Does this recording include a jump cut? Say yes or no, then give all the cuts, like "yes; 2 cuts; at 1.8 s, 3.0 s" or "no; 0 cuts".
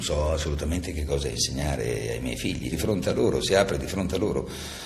yes; 1 cut; at 2.7 s